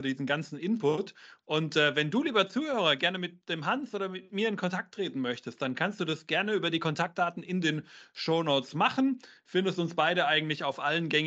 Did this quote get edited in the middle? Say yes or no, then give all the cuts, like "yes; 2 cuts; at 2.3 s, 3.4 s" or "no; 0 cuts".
no; 0 cuts